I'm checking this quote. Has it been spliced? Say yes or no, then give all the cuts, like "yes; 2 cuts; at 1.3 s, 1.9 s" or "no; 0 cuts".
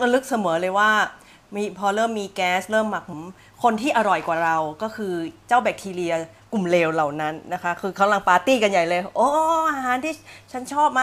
yes; 1 cut; at 3.1 s